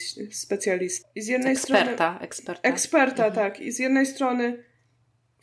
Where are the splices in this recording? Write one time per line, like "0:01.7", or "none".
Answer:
0:01.0

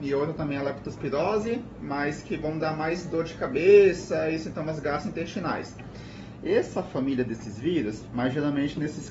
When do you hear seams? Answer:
0:06.4
0:08.1

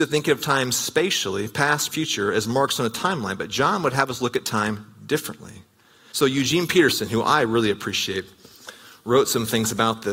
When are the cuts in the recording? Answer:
0:01.9
0:06.1

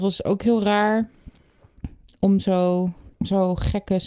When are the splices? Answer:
0:03.1

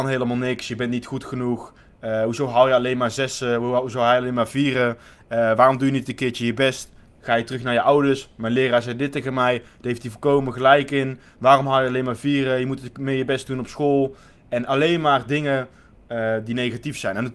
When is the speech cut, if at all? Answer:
none

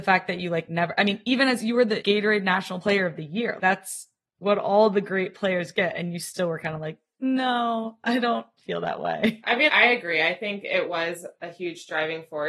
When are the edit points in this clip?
0:03.6
0:09.7

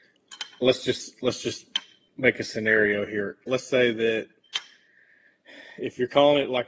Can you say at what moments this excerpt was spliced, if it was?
none

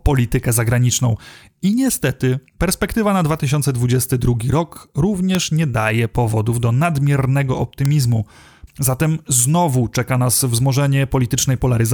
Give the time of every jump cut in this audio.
0:02.5
0:08.7

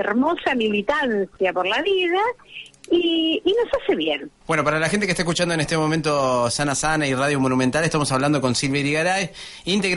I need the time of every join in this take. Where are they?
0:04.4

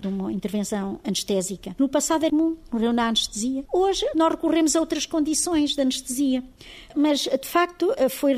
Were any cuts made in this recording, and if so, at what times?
0:02.3

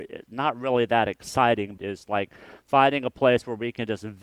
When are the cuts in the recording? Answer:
0:01.8

